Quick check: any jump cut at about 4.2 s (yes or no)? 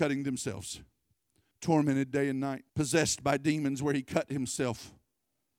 no